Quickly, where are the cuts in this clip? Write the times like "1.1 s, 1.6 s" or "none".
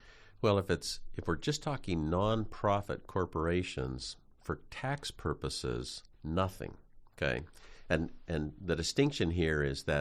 6.1 s